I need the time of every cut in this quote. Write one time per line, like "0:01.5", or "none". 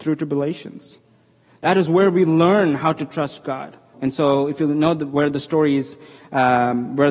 0:03.9